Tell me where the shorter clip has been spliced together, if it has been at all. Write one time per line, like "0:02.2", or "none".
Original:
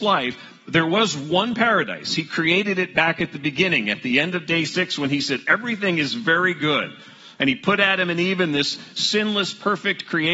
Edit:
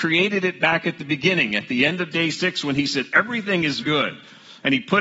0:03.8